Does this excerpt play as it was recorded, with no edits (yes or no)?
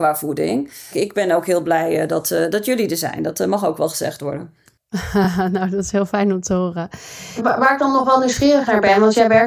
yes